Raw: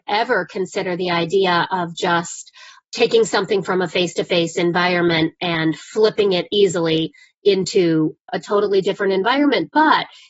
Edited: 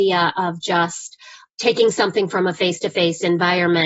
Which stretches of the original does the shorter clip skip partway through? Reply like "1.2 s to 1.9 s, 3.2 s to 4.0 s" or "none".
none